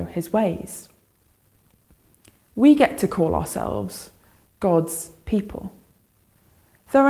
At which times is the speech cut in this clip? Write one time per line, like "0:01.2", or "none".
none